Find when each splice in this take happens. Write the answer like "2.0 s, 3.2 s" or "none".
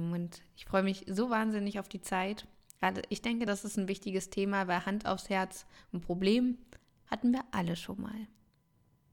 none